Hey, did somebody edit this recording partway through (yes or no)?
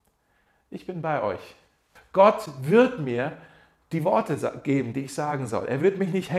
yes